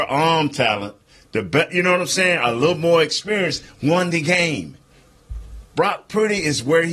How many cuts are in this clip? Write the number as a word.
zero